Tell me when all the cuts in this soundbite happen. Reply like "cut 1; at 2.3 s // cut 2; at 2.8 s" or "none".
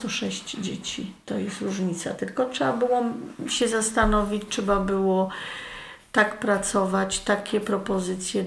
none